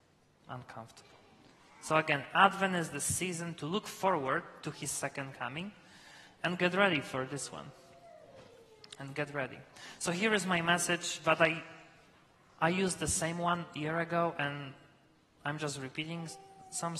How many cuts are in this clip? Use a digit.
0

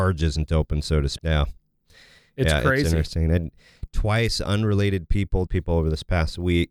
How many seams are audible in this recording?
2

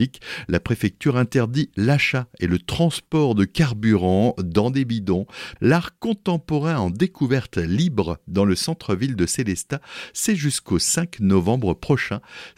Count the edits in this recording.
1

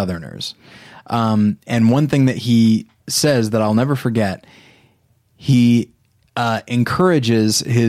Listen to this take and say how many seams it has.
0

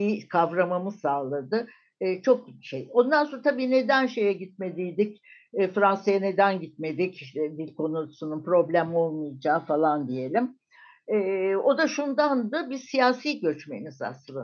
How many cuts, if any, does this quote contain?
0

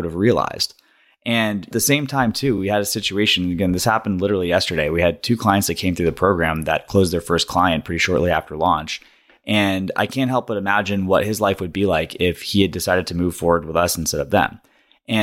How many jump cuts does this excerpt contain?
0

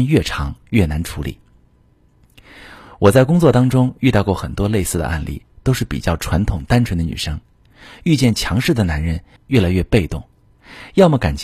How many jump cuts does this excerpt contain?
1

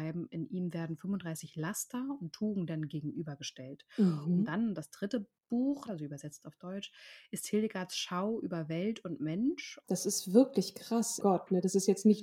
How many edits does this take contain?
3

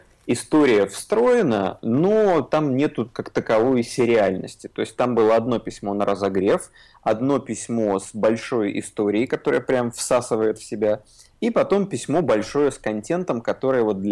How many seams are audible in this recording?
0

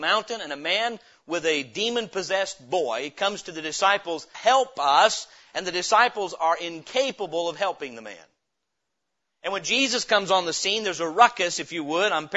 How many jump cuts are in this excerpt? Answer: 1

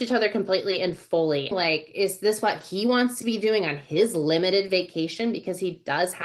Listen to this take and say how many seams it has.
1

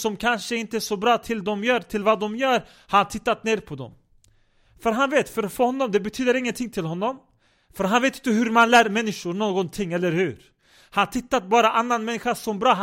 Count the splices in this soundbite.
0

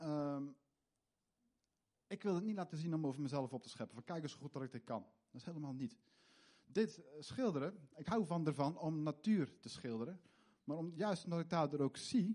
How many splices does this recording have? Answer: 1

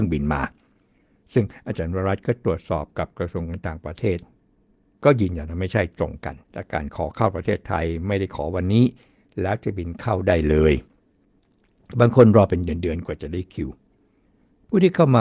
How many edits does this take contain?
1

